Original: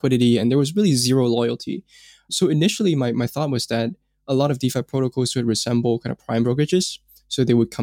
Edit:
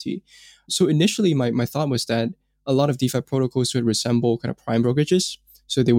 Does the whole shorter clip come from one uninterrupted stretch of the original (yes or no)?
yes